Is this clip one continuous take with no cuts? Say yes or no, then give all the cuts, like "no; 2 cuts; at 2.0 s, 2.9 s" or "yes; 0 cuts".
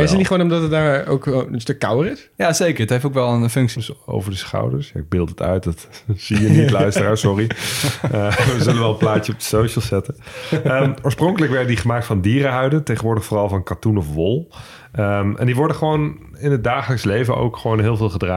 no; 1 cut; at 3.8 s